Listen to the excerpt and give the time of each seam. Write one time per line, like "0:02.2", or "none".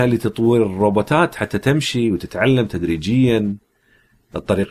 none

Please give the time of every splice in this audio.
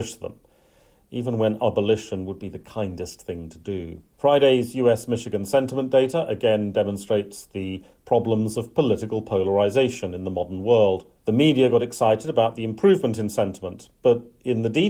0:04.1
0:11.2

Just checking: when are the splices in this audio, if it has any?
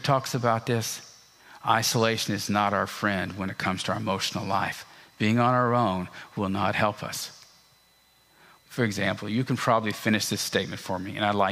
0:08.6

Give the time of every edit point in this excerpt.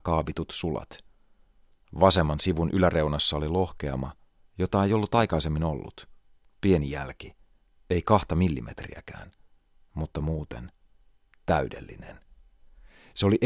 none

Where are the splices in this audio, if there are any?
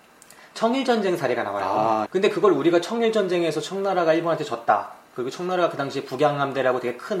0:02.1

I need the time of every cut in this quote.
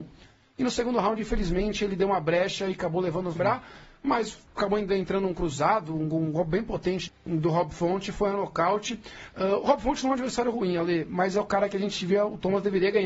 0:03.4
0:07.1

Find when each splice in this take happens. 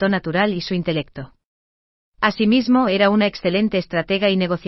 none

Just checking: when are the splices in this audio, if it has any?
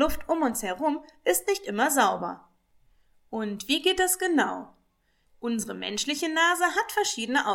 0:05.3

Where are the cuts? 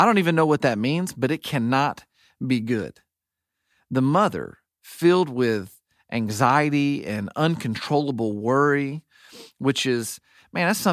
none

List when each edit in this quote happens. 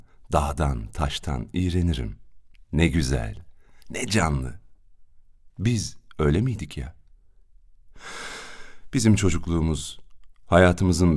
0:02.5

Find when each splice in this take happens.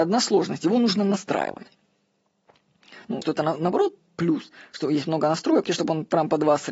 0:03.2
0:05.6

